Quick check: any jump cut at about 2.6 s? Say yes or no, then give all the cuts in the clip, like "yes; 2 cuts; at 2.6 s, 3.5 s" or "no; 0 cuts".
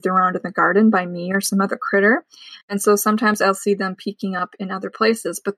no; 0 cuts